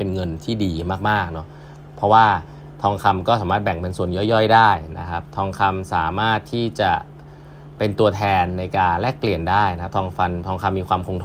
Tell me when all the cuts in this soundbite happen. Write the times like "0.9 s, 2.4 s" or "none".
7.8 s